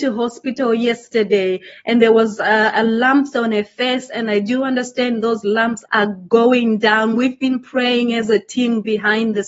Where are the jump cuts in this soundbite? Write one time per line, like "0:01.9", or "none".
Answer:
0:05.8